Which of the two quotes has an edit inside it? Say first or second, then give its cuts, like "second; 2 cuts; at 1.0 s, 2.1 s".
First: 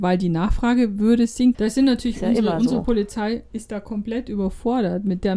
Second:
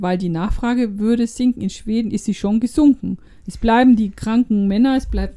first; 1 cut; at 1.5 s